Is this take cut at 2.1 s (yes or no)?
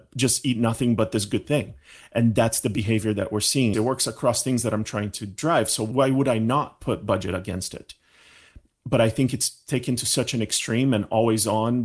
no